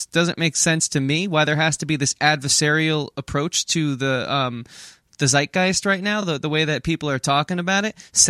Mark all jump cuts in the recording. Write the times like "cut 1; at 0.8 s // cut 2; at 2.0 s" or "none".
none

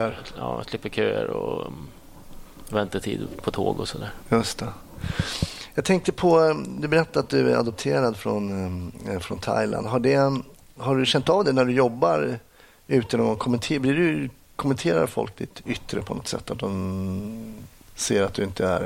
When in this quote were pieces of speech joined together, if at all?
none

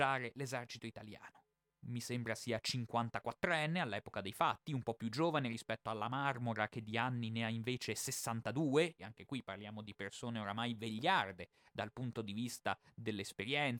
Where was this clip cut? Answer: cut 1; at 1.6 s // cut 2; at 9.0 s

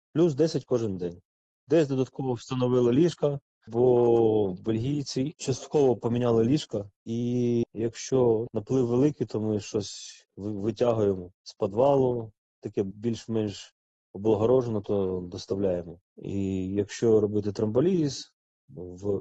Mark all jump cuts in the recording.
cut 1; at 16.0 s

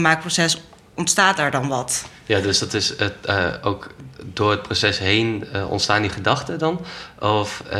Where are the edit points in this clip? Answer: none

